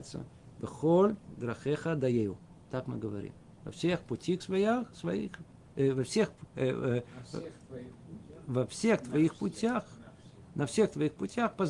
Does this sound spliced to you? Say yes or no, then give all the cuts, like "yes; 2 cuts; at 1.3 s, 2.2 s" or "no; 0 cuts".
no; 0 cuts